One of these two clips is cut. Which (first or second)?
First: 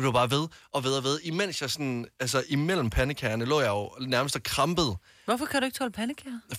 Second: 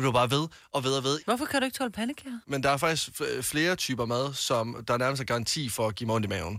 second